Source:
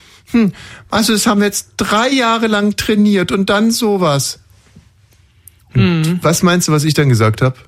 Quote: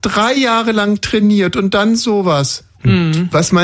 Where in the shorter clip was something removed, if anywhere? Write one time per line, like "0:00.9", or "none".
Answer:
0:02.7